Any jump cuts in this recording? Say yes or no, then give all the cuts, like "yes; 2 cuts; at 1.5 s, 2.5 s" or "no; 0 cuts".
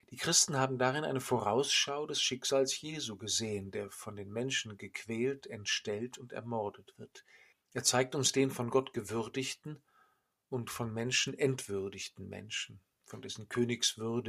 yes; 1 cut; at 7.5 s